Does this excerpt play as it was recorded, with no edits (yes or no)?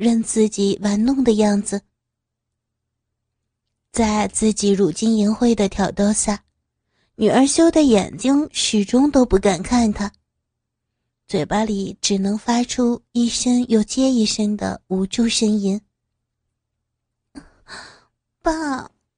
yes